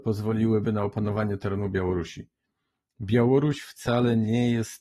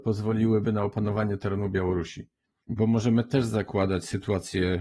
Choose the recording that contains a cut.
second; 1 cut; at 2.6 s

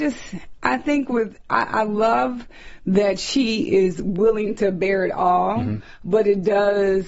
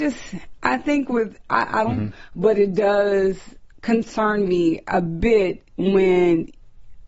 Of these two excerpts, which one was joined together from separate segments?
second; 1 cut; at 1.9 s

